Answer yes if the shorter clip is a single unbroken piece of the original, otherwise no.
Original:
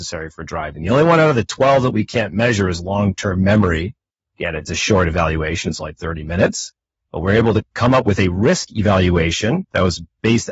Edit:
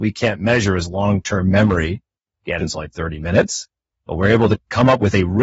no